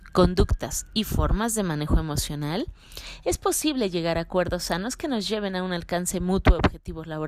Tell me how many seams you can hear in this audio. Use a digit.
0